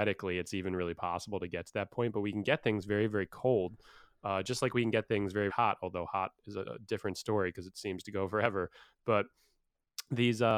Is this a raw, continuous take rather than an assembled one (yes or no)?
no